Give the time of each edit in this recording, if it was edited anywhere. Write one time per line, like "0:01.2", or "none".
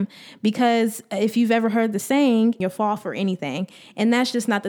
0:02.6